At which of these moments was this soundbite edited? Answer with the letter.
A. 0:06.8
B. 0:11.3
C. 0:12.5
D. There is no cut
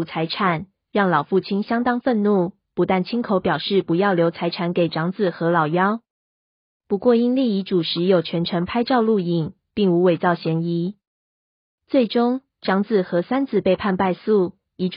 A